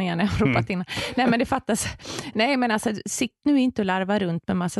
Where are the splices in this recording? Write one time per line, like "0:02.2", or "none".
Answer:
none